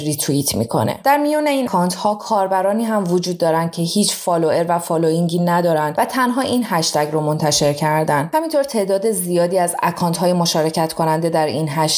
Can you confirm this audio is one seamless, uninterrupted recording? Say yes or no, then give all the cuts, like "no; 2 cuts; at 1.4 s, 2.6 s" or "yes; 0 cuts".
no; 1 cut; at 1.7 s